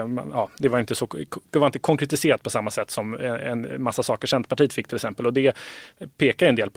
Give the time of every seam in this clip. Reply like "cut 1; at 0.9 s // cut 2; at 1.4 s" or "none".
none